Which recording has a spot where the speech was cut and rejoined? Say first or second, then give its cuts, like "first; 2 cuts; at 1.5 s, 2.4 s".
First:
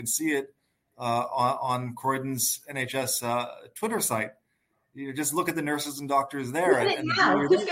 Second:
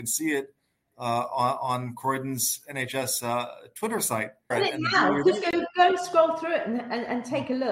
second; 1 cut; at 4.5 s